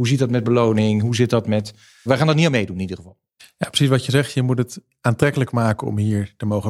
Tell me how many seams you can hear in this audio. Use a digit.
1